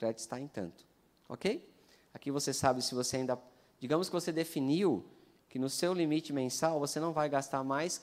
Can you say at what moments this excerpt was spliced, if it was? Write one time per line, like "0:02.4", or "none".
none